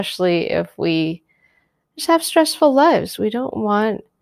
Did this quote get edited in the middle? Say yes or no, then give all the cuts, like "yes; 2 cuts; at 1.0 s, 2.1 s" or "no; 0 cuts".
yes; 1 cut; at 3.2 s